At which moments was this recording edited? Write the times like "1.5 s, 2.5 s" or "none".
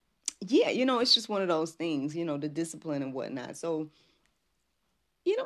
none